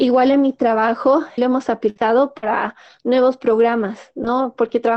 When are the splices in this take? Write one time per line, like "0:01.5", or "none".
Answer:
0:01.4